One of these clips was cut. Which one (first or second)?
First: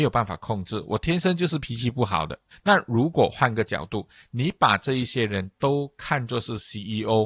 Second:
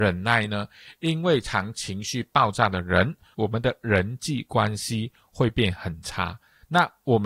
second